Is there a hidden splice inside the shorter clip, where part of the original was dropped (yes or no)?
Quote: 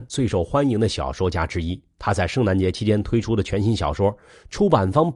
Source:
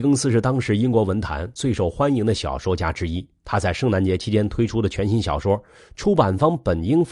no